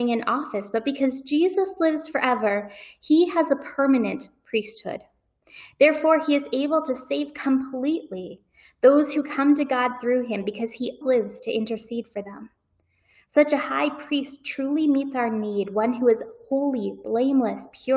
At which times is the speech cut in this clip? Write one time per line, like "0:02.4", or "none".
0:11.0